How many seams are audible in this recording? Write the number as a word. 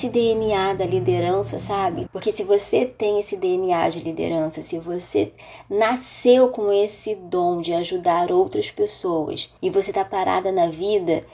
two